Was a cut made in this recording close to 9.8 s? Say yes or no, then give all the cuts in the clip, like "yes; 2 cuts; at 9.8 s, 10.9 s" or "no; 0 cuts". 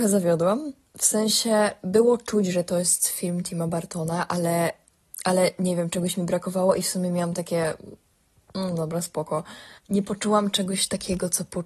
yes; 1 cut; at 9.8 s